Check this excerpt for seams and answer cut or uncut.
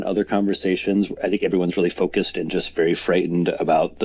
uncut